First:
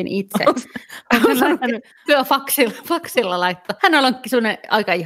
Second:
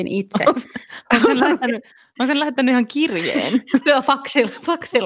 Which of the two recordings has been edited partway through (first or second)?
first